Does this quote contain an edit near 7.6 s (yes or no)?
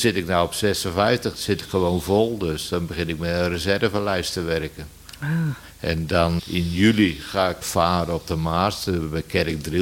yes